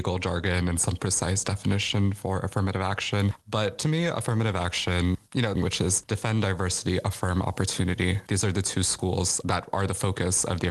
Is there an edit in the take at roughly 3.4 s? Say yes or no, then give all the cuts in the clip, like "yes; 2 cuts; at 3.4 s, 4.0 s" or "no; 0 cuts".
no; 2 cuts; at 5.5 s, 8.3 s